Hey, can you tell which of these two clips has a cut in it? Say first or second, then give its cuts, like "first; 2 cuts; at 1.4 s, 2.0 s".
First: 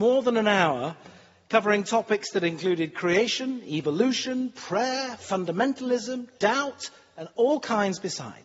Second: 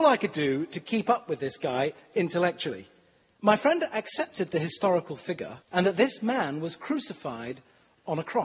second; 2 cuts; at 3.4 s, 5.6 s